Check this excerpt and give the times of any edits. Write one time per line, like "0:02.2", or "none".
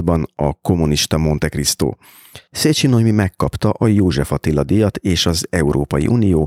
none